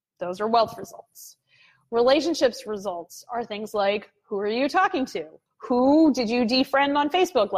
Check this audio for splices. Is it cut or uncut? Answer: cut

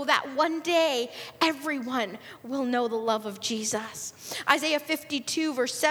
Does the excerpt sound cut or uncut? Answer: uncut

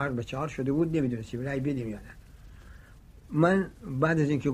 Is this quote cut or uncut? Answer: uncut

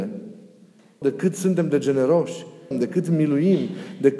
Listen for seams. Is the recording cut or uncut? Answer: cut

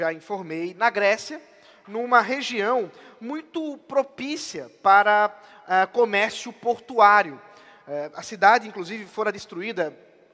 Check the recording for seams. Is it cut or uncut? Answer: uncut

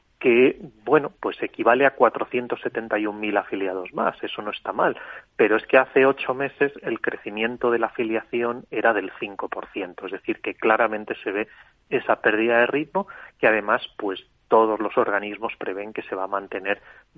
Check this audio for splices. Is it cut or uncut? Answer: uncut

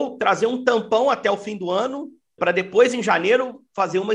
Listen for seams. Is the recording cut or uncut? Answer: cut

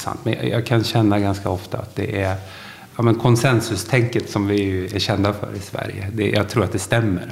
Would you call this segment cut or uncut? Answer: uncut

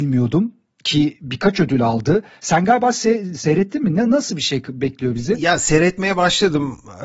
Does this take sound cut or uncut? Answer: uncut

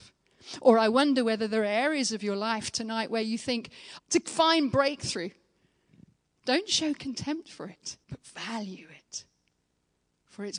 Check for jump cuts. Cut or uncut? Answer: cut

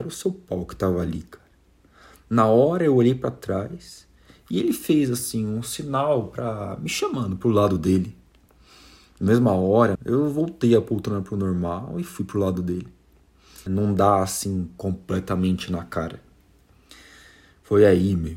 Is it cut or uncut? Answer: cut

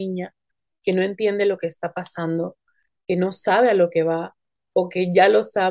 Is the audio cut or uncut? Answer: uncut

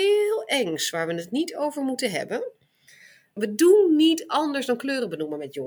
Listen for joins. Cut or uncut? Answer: cut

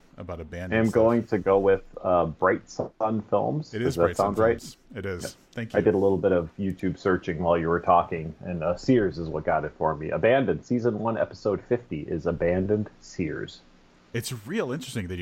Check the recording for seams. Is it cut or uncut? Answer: uncut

